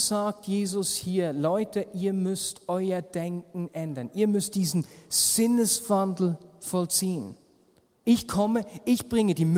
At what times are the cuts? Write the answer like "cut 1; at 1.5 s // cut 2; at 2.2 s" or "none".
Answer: cut 1; at 8.0 s

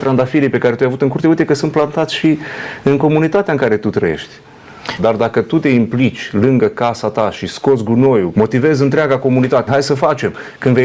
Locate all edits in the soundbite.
cut 1; at 5.0 s // cut 2; at 8.3 s // cut 3; at 9.7 s

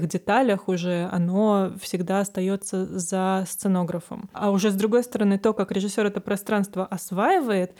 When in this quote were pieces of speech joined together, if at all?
cut 1; at 4.3 s

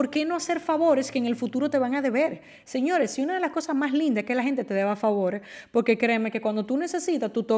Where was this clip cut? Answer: none

